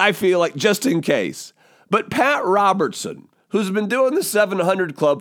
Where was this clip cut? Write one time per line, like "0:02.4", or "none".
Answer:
none